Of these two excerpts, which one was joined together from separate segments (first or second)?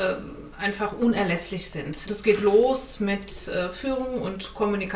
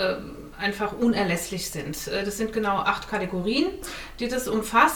first